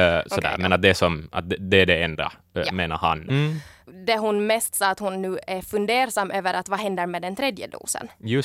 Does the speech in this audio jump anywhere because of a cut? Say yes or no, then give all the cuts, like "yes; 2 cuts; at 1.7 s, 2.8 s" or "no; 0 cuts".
yes; 1 cut; at 3.3 s